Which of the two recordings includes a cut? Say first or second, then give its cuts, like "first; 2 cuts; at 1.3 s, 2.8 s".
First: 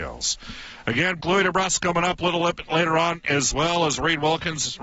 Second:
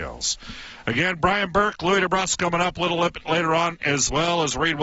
first; 1 cut; at 1.2 s